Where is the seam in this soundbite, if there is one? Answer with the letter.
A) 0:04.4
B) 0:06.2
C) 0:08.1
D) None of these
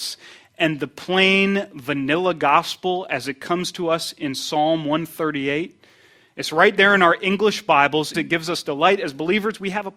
C